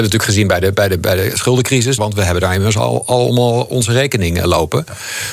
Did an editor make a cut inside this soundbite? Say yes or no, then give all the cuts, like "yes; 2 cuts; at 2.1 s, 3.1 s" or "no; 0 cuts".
yes; 1 cut; at 2.0 s